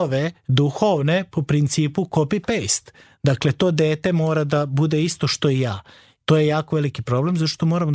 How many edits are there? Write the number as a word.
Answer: one